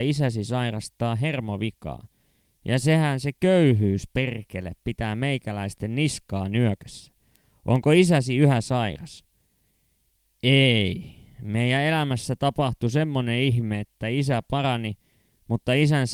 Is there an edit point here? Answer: no; 0 cuts

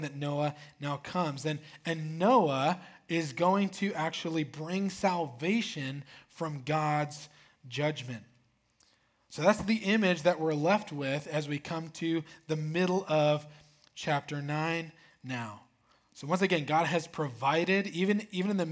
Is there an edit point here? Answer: no; 0 cuts

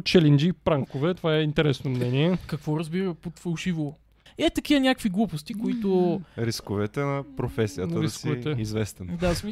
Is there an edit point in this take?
yes; 1 cut; at 4.3 s

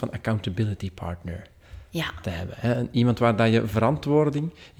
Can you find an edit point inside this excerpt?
no; 0 cuts

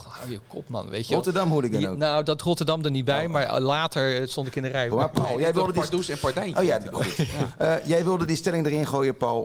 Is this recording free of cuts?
no; 2 cuts; at 4.9 s, 6.9 s

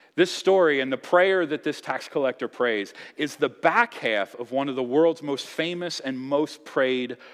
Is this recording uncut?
yes; 0 cuts

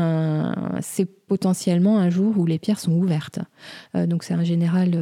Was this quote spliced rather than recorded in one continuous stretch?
yes; 1 cut; at 3.9 s

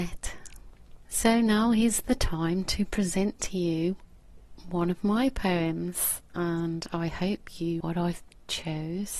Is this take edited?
yes; 2 cuts; at 1.0 s, 7.8 s

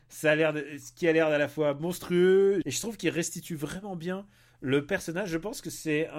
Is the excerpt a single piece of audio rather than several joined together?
no; 1 cut; at 2.6 s

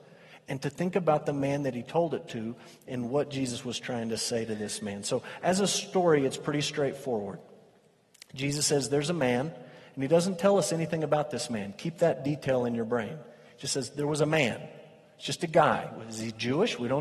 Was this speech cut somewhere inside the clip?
no; 0 cuts

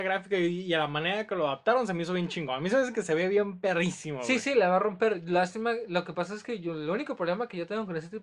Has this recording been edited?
no; 0 cuts

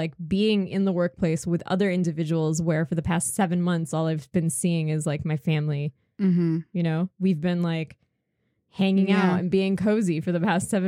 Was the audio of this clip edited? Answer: no; 0 cuts

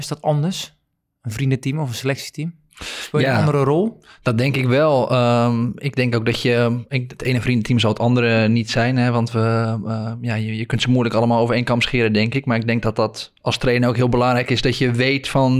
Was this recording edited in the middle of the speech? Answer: no; 0 cuts

